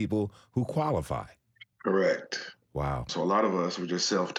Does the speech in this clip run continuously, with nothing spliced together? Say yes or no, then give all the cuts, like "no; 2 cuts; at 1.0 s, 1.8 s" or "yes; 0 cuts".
no; 2 cuts; at 1.7 s, 3.1 s